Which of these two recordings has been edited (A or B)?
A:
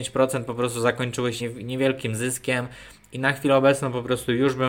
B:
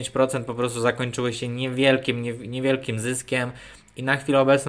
A